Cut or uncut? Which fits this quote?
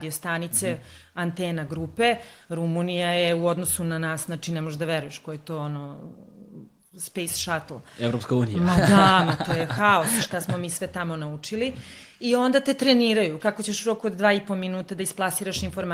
cut